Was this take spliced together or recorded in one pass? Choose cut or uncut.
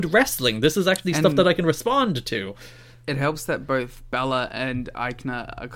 uncut